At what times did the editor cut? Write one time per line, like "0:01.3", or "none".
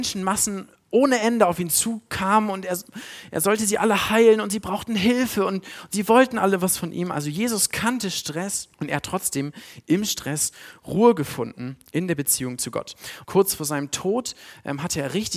0:08.7
0:13.2

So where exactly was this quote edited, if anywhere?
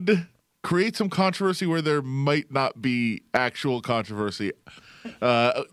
0:04.8

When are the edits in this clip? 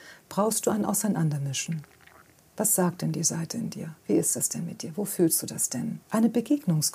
0:06.0

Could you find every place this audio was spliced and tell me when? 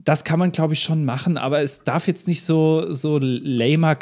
none

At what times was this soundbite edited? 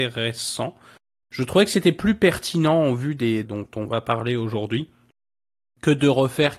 0:01.2
0:03.4

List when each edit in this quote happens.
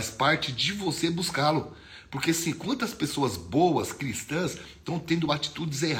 none

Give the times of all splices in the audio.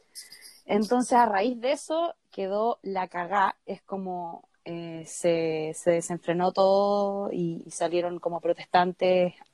0:07.6

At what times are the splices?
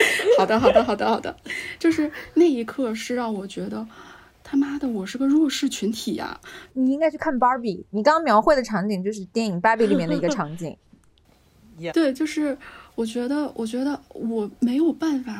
0:06.7
0:11.9

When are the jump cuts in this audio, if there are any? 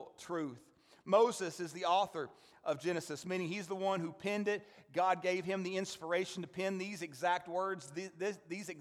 none

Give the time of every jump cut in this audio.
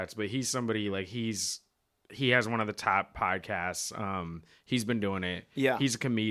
none

